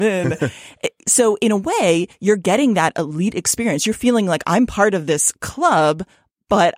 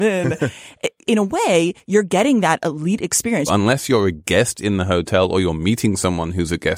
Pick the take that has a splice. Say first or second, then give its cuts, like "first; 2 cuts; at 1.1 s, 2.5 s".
second; 2 cuts; at 1.1 s, 3.5 s